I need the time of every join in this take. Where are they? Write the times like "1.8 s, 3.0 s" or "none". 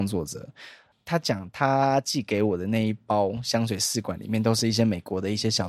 0.9 s